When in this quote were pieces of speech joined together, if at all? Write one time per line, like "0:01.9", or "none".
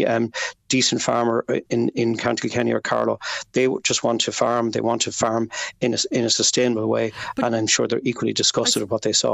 none